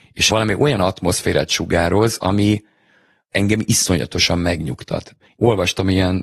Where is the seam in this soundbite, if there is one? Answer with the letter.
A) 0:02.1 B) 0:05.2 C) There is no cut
B